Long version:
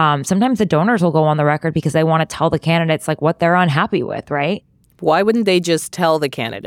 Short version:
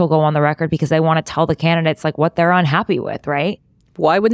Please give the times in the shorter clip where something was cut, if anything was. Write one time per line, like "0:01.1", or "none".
none